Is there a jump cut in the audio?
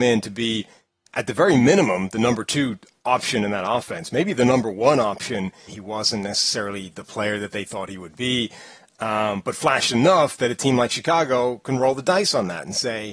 yes; 1 cut; at 5.7 s

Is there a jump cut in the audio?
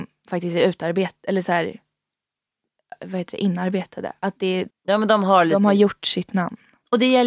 yes; 1 cut; at 4.7 s

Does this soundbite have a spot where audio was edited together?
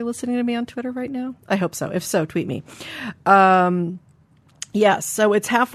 no; 0 cuts

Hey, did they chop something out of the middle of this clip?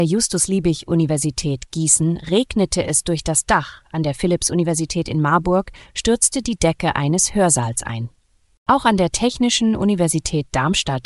no; 0 cuts

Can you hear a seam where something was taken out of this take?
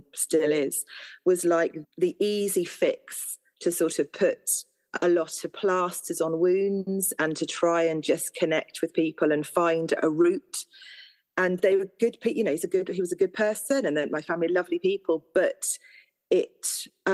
yes; 1 cut; at 1.8 s

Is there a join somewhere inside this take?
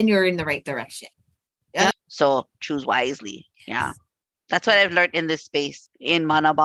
yes; 2 cuts; at 1.9 s, 3.5 s

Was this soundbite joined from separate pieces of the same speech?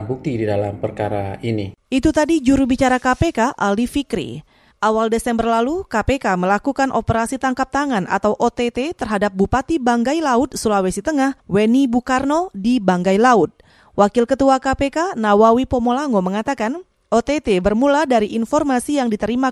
no; 0 cuts

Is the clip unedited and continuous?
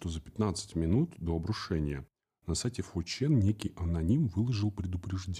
yes; 0 cuts

